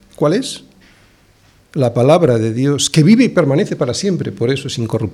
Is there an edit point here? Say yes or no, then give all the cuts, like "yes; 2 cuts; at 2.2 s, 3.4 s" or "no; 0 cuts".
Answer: no; 0 cuts